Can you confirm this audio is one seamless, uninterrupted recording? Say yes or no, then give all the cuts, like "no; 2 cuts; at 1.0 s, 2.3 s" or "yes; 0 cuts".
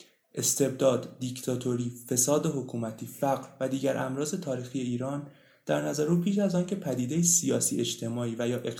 yes; 0 cuts